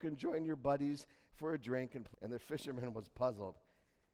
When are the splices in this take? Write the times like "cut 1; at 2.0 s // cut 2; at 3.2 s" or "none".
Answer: none